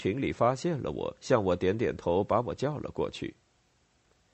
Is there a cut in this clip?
no; 0 cuts

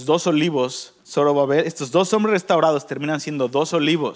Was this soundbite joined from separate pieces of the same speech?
yes; 1 cut; at 1.0 s

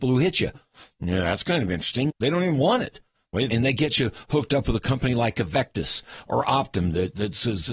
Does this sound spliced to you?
yes; 2 cuts; at 2.1 s, 3.5 s

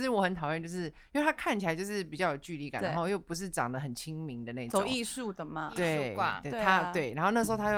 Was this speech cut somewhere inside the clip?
no; 0 cuts

